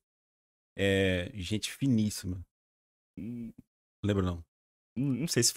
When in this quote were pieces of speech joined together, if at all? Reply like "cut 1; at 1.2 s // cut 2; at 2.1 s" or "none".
cut 1; at 3.1 s